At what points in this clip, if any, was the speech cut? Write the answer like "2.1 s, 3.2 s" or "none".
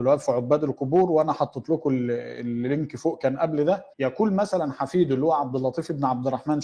3.9 s